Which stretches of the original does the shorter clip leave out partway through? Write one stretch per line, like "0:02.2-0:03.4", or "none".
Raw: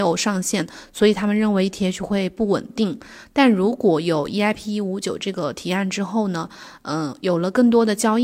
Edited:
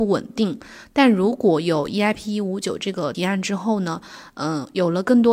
0:05.5-0:05.6